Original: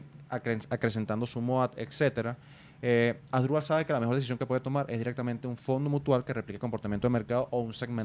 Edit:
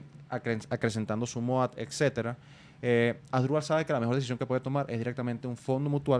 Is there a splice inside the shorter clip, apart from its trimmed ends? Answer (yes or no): no